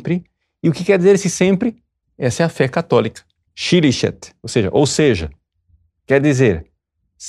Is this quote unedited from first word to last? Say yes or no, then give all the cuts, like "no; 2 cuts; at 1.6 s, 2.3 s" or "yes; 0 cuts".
no; 2 cuts; at 2.0 s, 3.5 s